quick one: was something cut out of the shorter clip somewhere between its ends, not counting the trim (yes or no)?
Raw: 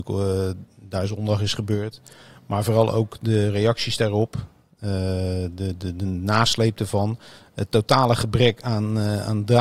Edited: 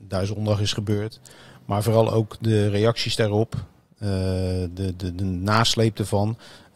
no